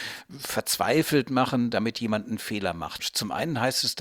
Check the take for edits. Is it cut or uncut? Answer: cut